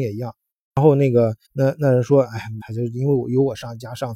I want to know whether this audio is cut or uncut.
cut